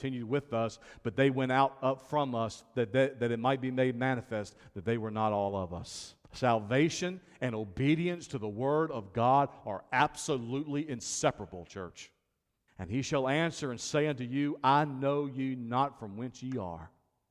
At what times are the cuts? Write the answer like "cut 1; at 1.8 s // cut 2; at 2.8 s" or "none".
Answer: cut 1; at 6.2 s // cut 2; at 12.7 s